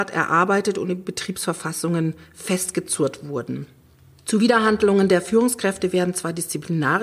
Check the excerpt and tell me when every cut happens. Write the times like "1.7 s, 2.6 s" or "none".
none